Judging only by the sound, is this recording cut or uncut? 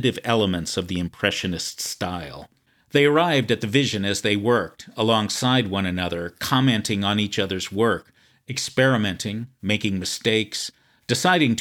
uncut